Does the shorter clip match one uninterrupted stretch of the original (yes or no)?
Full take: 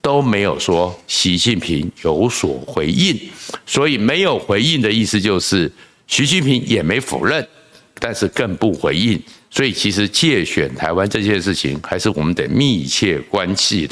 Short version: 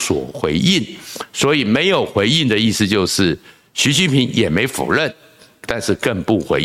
yes